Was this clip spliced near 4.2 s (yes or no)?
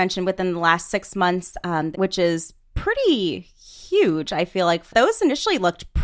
no